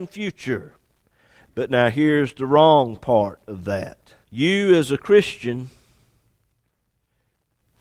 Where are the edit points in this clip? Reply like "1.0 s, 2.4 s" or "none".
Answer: 1.5 s, 4.2 s